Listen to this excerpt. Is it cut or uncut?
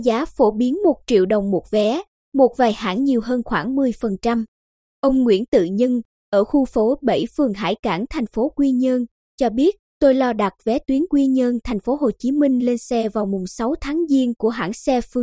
uncut